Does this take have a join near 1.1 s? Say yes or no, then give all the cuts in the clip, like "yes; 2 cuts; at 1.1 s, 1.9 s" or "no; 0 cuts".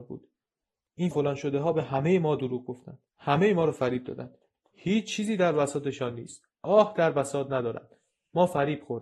yes; 2 cuts; at 1.1 s, 3.1 s